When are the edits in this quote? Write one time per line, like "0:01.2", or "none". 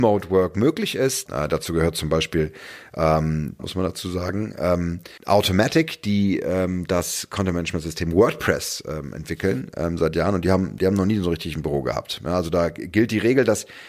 0:01.3
0:03.6
0:05.2